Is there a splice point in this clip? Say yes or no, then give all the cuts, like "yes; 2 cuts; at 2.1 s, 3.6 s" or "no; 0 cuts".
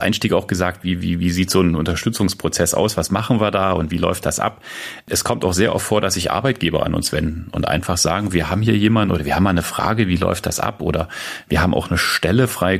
no; 0 cuts